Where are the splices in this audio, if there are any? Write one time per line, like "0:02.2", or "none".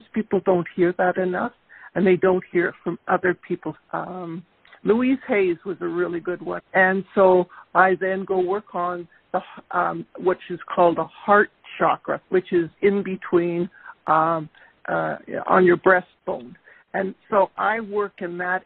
0:03.8
0:06.6
0:12.2